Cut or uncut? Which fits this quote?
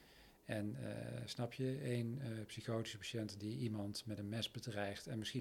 uncut